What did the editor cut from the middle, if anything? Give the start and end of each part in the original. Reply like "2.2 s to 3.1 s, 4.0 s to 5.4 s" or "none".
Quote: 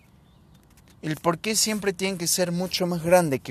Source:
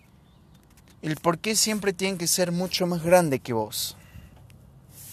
none